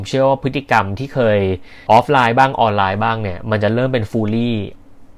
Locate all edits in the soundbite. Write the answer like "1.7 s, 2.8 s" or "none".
1.9 s